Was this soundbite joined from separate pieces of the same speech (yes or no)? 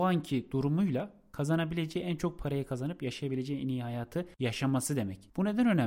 no